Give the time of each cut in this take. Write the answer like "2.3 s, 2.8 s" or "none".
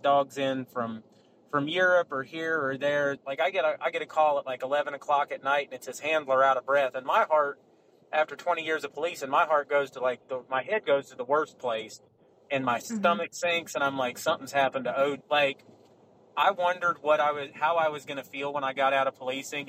3.2 s, 15.2 s